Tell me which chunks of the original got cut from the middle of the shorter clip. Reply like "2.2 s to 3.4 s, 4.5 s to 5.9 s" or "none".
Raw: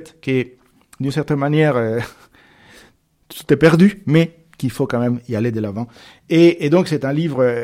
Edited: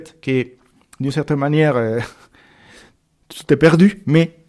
none